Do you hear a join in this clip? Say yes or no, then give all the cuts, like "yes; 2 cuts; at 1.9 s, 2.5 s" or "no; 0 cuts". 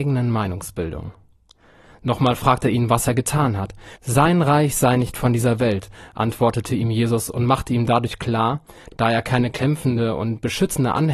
yes; 2 cuts; at 4.0 s, 8.9 s